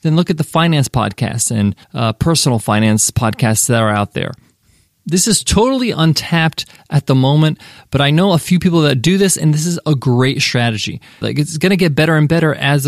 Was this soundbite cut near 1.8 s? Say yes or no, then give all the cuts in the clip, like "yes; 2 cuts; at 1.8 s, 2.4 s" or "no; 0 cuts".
yes; 2 cuts; at 1.8 s, 11.2 s